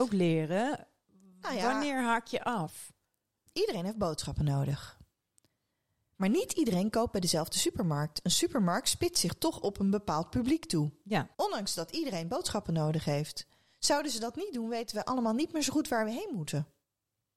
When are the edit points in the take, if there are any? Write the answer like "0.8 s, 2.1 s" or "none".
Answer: 3.5 s, 11.3 s